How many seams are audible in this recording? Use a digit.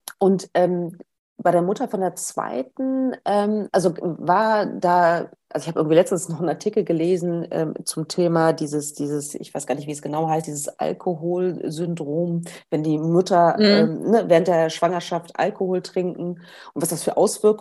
0